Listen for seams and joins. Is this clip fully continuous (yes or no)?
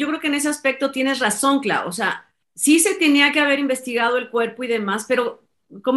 no